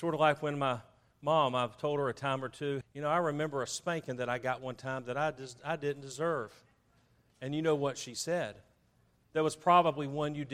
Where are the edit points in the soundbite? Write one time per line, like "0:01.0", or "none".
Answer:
0:02.8